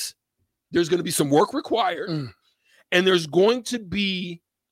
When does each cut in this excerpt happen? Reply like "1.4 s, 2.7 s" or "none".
none